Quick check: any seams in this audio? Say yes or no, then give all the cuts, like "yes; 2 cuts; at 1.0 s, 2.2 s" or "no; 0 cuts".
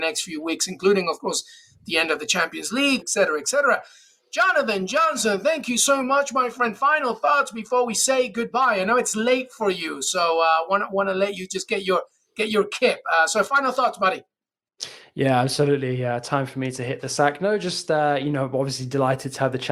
yes; 1 cut; at 3.0 s